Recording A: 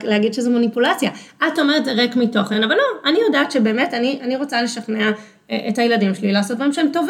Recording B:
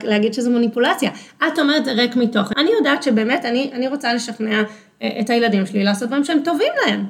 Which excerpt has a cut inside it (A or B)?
B